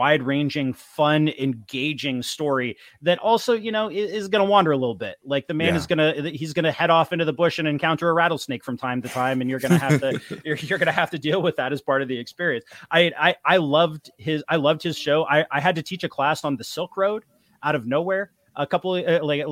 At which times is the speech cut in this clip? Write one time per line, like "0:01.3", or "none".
none